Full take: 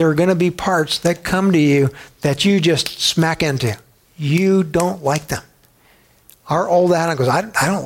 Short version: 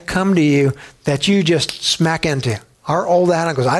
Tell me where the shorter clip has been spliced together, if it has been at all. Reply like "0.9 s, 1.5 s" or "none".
2.7 s